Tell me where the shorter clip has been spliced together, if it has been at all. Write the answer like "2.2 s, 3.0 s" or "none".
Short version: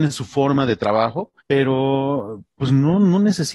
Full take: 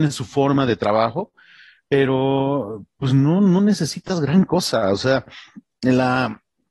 1.4 s